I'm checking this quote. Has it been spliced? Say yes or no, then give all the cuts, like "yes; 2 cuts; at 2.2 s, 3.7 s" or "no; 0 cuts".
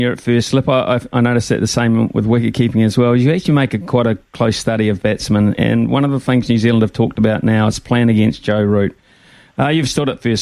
no; 0 cuts